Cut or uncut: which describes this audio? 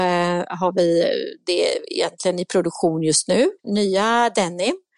cut